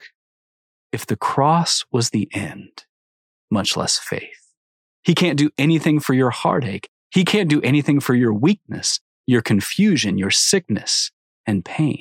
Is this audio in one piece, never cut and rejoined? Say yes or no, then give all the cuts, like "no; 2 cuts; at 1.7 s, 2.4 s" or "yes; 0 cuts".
no; 2 cuts; at 3.3 s, 4.9 s